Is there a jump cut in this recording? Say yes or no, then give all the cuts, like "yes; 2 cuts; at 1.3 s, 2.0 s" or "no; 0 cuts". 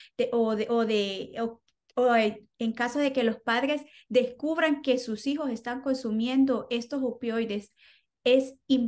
no; 0 cuts